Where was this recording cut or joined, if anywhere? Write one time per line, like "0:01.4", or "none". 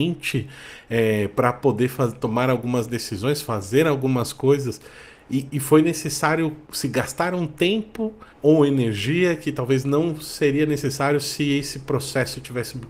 0:05.5
0:06.6
0:08.3